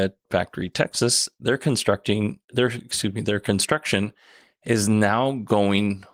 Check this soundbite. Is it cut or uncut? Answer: uncut